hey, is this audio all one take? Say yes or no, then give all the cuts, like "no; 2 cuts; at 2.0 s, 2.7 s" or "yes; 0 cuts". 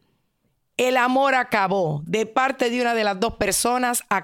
yes; 0 cuts